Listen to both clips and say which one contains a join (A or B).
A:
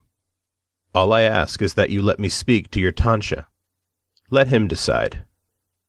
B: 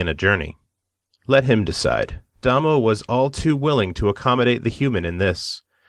B